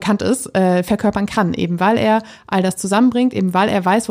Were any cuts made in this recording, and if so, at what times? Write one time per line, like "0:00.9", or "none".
none